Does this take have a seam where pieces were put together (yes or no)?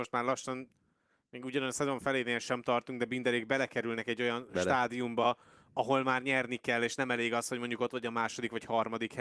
no